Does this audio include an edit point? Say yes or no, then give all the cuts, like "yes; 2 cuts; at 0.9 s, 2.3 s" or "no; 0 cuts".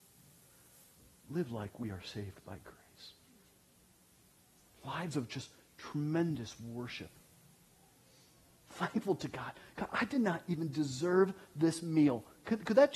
no; 0 cuts